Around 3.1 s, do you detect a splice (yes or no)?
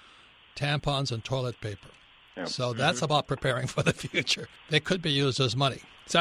no